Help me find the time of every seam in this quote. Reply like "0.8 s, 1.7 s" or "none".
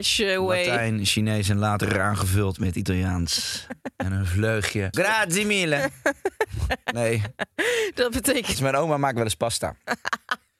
4.9 s, 8.5 s